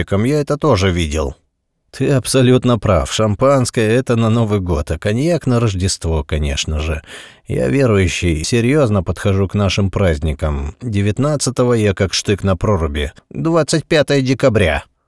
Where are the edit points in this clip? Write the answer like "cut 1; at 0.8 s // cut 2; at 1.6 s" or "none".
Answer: cut 1; at 1.9 s // cut 2; at 8.4 s // cut 3; at 13.2 s